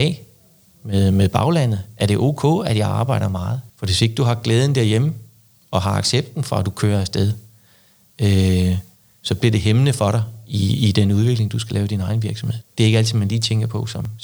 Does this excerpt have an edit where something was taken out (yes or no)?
yes